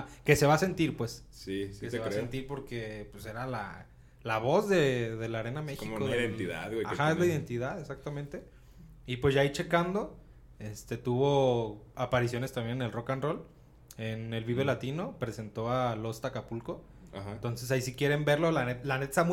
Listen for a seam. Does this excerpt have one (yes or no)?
no